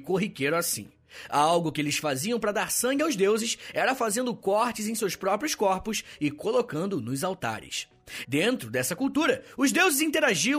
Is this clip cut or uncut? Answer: cut